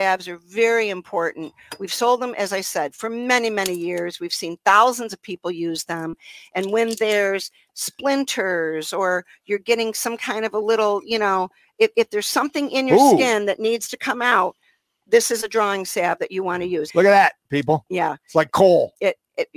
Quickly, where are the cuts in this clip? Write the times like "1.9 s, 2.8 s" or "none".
16.9 s